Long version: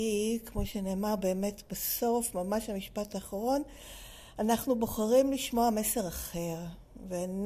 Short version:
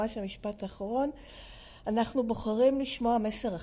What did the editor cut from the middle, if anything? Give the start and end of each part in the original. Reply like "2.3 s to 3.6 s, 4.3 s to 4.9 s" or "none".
none